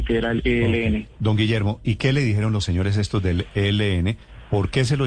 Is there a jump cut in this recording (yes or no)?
no